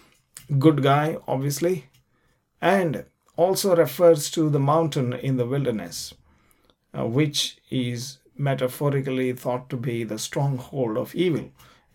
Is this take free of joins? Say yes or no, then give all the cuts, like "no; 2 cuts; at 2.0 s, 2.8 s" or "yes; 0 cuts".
yes; 0 cuts